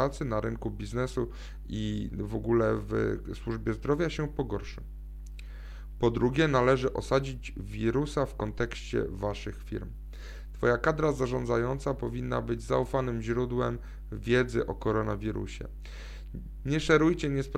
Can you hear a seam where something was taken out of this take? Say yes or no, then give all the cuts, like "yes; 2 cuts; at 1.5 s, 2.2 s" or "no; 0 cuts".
yes; 1 cut; at 16.6 s